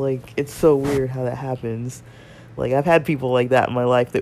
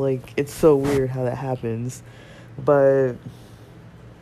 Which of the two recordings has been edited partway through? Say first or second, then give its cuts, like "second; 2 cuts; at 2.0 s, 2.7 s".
second; 1 cut; at 2.6 s